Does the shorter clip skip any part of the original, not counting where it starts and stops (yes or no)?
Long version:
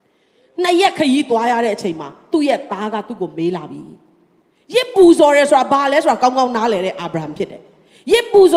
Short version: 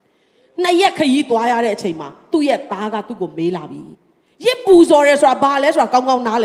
yes